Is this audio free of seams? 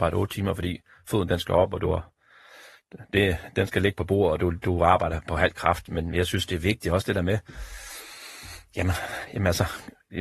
yes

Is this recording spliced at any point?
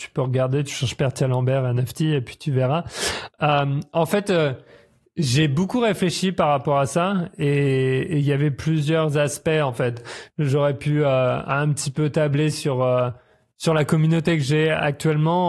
no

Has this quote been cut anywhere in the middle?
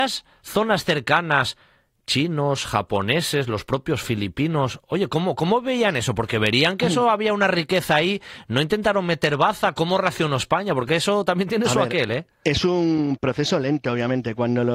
no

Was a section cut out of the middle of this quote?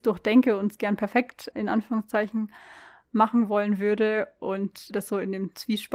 yes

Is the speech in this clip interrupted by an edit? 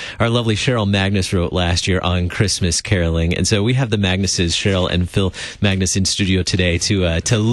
no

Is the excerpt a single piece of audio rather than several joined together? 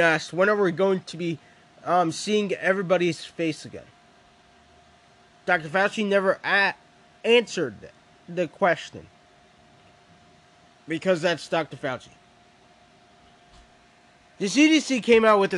yes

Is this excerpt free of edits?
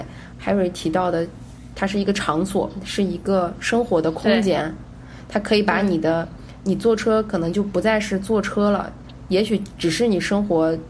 yes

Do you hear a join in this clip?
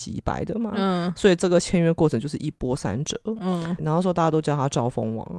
yes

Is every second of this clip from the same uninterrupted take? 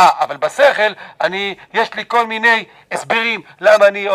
yes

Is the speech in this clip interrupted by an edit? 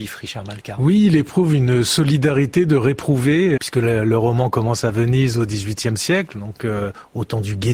yes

